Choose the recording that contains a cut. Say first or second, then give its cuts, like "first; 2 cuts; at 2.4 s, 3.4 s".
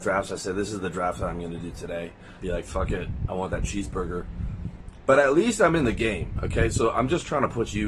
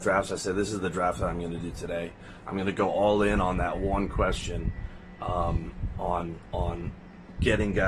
first; 1 cut; at 2.4 s